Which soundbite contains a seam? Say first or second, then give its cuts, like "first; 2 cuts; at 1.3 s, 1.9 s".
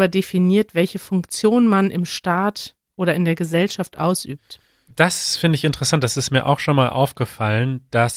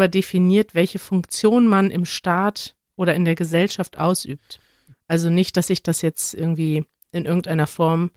second; 1 cut; at 4.9 s